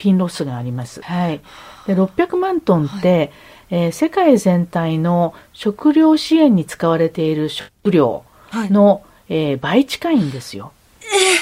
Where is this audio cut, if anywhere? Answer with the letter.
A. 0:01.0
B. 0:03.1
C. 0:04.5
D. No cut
A